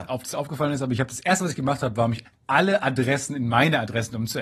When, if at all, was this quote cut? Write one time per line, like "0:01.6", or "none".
0:02.2